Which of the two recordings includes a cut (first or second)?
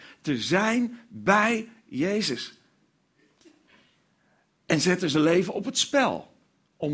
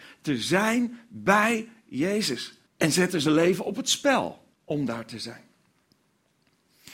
second